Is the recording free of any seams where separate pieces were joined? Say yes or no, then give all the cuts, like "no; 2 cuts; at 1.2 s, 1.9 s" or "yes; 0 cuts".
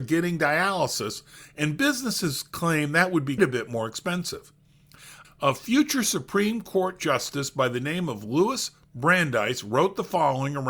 no; 2 cuts; at 3.4 s, 5.2 s